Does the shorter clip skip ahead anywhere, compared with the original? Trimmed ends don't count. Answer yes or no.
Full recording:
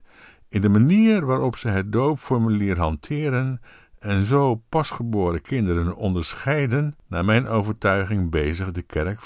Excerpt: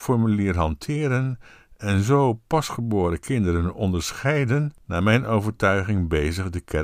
no